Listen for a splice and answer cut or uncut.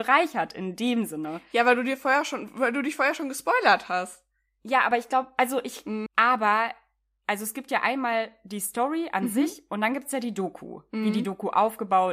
cut